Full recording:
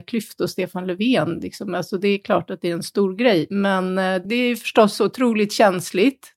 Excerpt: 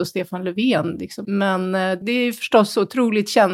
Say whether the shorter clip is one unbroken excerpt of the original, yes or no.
no